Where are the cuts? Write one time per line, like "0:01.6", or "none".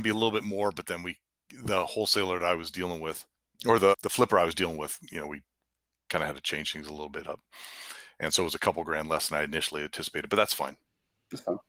0:03.9